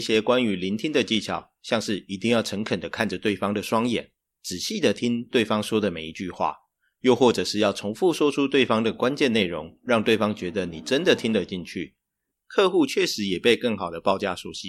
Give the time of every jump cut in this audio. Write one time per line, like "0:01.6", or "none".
0:12.3